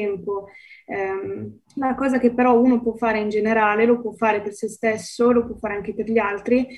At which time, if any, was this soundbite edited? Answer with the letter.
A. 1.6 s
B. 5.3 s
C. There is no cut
A